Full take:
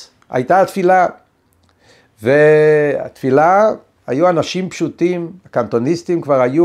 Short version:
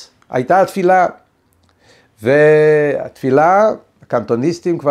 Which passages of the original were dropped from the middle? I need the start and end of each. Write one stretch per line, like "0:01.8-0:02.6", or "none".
0:04.0-0:05.4